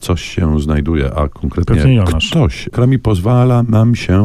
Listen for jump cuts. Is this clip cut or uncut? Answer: cut